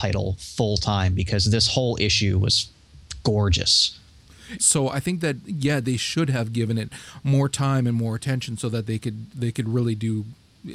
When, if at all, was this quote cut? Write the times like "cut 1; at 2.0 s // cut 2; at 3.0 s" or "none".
cut 1; at 4.6 s